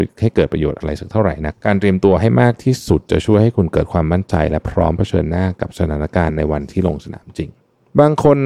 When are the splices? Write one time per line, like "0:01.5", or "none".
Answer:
0:01.5